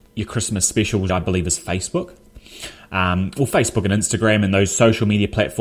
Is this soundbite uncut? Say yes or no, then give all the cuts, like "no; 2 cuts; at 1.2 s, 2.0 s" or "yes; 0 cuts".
no; 1 cut; at 1.1 s